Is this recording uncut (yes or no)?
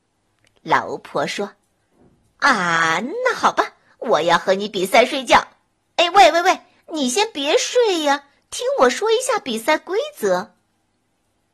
yes